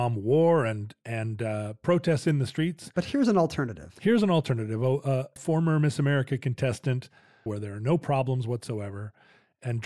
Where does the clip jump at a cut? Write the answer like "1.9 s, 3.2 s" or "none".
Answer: 5.4 s, 7.5 s